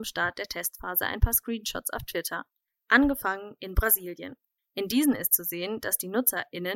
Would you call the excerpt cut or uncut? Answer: cut